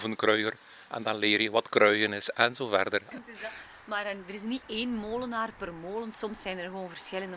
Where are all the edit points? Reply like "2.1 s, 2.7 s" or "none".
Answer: 3.1 s